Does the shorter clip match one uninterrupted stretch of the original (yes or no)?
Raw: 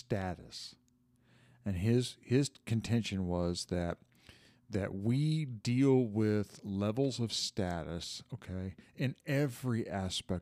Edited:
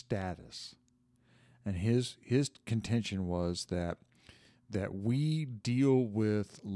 yes